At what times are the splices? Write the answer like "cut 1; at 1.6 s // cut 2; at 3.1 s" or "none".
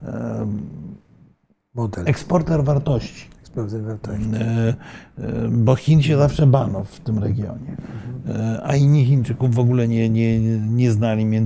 none